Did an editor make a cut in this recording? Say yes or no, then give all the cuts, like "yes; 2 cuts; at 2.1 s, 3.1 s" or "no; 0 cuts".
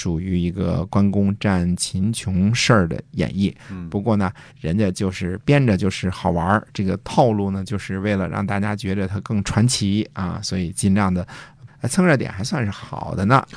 yes; 2 cuts; at 4.5 s, 11.7 s